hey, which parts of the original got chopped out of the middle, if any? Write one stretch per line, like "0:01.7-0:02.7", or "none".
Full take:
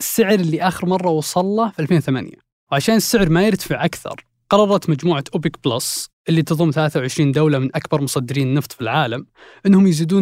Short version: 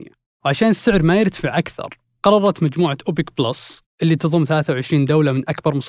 none

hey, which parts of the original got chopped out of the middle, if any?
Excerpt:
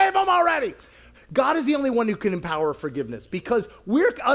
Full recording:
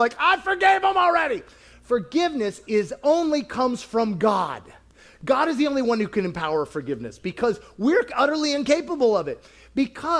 0:01.8-0:05.1

